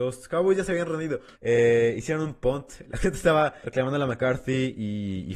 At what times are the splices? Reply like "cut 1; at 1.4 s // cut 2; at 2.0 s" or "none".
cut 1; at 1.3 s // cut 2; at 3.6 s

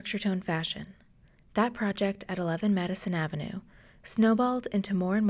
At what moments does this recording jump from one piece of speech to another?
none

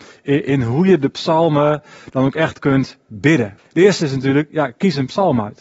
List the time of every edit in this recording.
cut 1; at 3.6 s

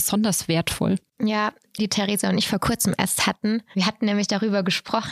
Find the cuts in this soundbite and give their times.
cut 1; at 1.8 s

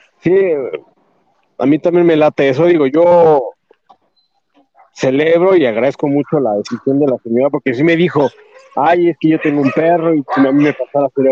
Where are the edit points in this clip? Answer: none

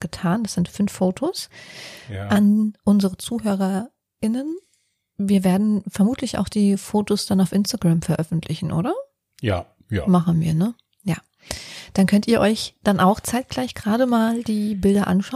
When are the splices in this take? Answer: none

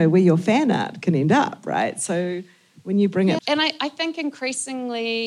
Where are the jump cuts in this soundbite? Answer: cut 1; at 3.4 s

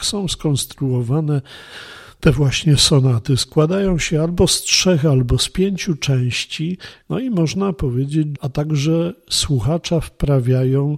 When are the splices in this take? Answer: cut 1; at 7.0 s // cut 2; at 8.4 s

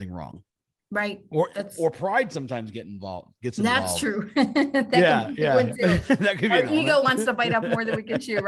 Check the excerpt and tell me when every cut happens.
none

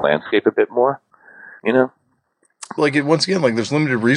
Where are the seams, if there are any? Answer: cut 1; at 2.8 s

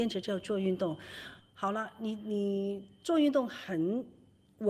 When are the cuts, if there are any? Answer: none

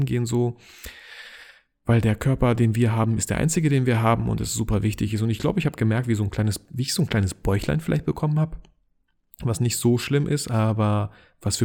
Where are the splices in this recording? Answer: none

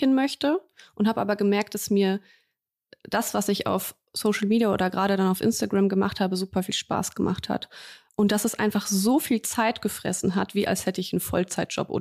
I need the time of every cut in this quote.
none

